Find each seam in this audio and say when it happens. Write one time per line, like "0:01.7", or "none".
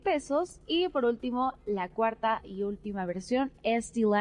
none